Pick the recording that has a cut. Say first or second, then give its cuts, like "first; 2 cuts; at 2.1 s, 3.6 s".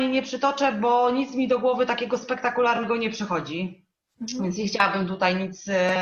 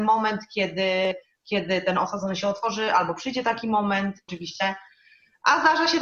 second; 1 cut; at 4.3 s